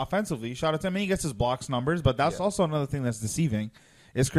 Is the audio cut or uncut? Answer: uncut